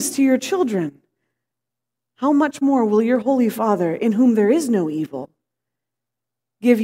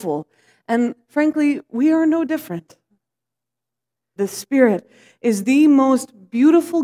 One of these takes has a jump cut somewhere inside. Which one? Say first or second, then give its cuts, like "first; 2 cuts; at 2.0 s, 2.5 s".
second; 1 cut; at 4.2 s